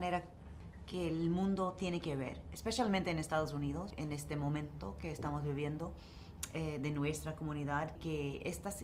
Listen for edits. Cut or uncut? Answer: cut